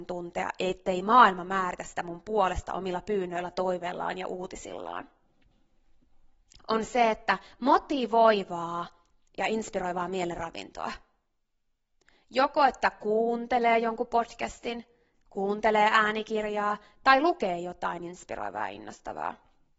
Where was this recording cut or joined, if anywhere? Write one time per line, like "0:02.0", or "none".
0:06.6

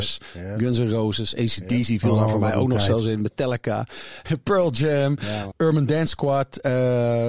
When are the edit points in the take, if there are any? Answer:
0:04.2
0:05.5

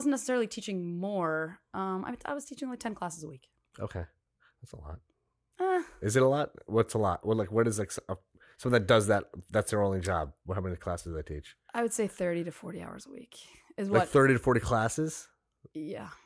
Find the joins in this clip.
none

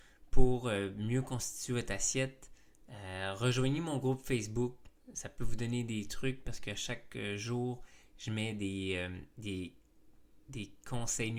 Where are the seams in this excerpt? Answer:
none

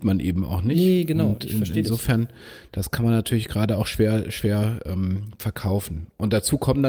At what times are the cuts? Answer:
none

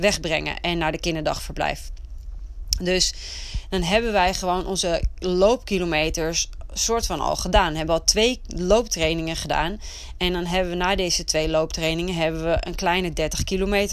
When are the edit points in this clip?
none

